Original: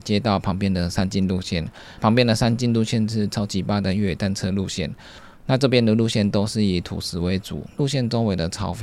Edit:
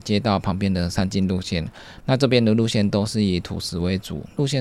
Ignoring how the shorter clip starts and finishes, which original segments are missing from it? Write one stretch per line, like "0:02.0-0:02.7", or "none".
0:02.0-0:05.4